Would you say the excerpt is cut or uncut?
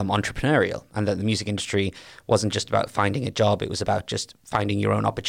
uncut